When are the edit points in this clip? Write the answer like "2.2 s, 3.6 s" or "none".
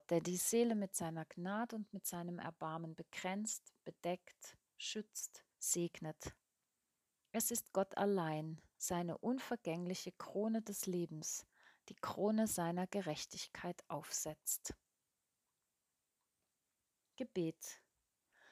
5.5 s, 8.7 s